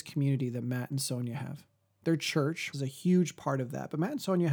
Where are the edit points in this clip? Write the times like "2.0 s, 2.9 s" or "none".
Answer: 2.7 s